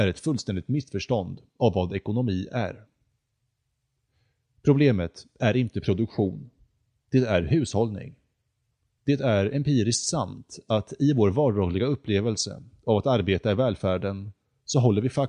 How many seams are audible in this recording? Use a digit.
1